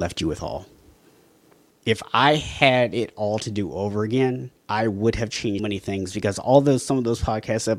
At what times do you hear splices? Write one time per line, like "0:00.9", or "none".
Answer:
0:01.7
0:04.6
0:05.6